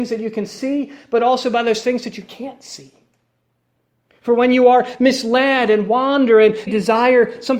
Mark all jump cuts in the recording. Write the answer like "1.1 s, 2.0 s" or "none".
6.7 s